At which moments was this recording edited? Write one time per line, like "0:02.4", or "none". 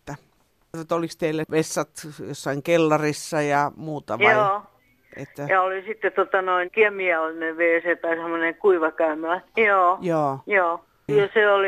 0:06.6
0:09.5